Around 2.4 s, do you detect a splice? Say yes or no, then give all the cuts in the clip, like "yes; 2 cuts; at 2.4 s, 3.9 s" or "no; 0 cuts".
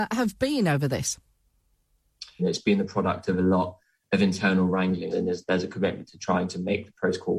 yes; 2 cuts; at 2.4 s, 5.1 s